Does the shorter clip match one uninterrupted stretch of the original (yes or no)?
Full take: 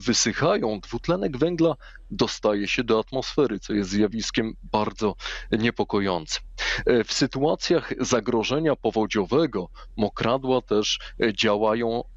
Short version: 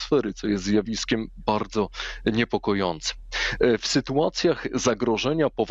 yes